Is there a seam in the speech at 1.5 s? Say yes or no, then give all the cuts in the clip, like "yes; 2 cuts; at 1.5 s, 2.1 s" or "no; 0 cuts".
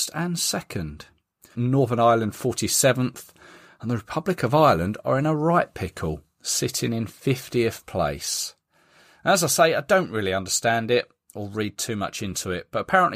yes; 1 cut; at 1.5 s